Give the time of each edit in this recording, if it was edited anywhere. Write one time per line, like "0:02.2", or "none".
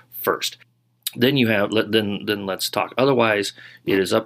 none